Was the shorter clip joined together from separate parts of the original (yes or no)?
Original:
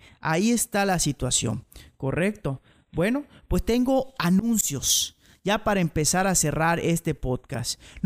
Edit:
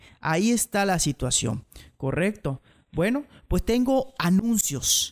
no